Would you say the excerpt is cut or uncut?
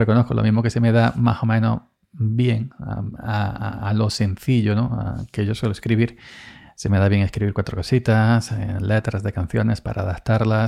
uncut